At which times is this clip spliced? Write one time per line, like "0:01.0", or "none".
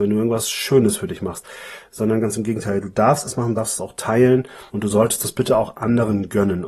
none